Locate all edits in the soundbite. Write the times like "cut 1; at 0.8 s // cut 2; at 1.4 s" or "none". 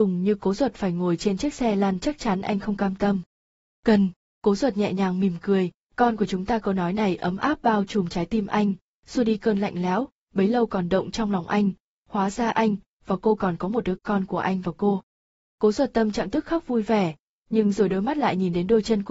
cut 1; at 14.0 s